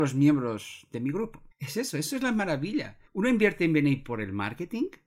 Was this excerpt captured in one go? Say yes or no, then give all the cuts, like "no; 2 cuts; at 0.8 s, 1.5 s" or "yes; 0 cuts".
no; 2 cuts; at 1.5 s, 3.1 s